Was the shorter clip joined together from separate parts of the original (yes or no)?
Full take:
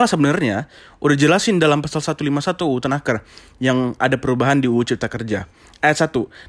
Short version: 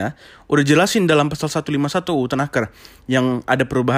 no